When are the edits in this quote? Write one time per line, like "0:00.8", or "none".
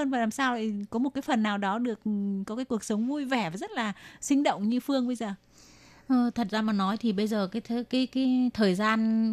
none